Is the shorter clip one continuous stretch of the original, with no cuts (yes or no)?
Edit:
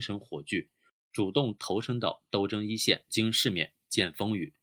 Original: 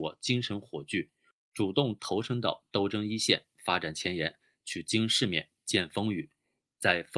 no